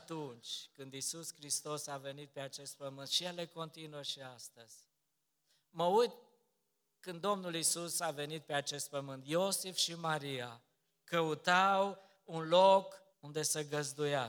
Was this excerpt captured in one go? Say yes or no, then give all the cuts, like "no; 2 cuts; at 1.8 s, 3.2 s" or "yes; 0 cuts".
no; 1 cut; at 13.1 s